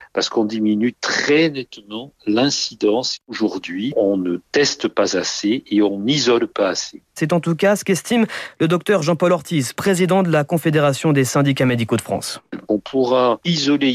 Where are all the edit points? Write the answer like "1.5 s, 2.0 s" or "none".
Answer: 7.2 s